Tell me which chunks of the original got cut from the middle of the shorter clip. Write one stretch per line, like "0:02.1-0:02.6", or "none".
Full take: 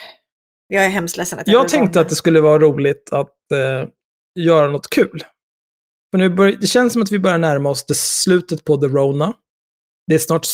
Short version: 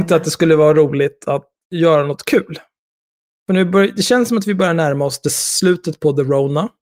0:03.5-0:04.3